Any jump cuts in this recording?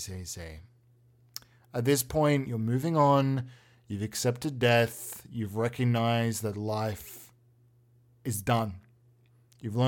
no; 0 cuts

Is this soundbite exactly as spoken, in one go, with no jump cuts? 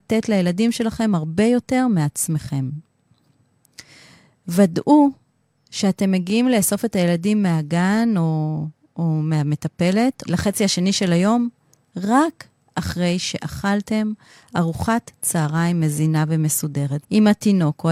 no; 2 cuts; at 10.3 s, 17.0 s

